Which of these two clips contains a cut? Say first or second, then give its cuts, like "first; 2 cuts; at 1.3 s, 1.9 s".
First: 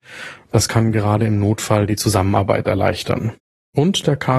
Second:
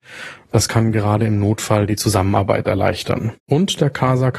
second; 1 cut; at 3.4 s